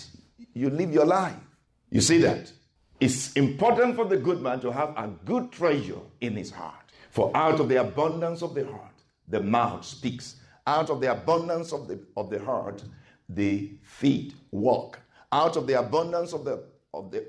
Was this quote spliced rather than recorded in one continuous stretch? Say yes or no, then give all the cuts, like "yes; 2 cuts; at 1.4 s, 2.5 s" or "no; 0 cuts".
no; 0 cuts